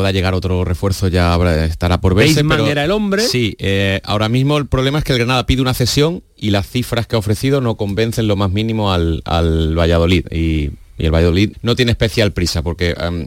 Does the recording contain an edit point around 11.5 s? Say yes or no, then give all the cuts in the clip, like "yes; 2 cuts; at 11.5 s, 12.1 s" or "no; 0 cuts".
yes; 1 cut; at 11.5 s